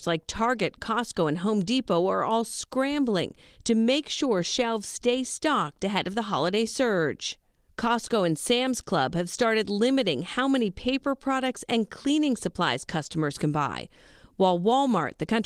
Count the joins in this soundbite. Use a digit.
0